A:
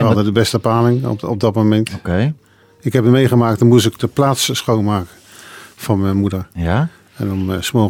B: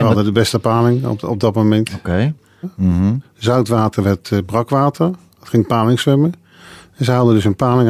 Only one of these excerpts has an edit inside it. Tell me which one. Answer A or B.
B